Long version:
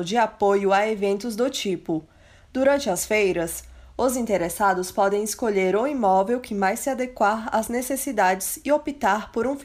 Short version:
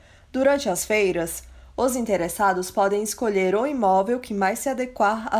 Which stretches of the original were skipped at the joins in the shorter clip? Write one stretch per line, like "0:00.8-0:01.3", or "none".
none